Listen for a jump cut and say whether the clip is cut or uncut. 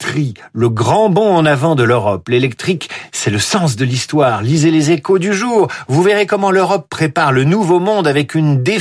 uncut